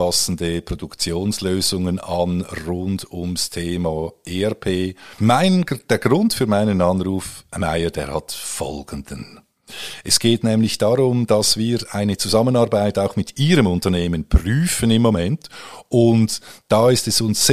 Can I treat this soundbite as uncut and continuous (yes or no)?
no